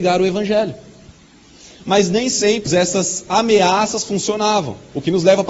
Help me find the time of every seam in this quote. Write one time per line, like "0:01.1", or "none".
0:02.7